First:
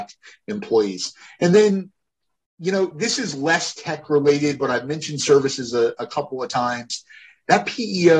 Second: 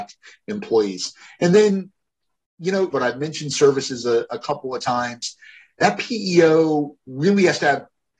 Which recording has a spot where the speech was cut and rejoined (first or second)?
second